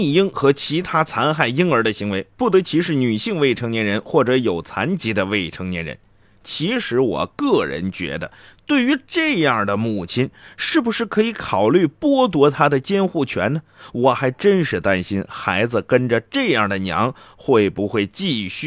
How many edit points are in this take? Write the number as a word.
zero